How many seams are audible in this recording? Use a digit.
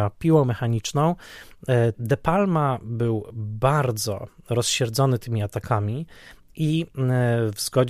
1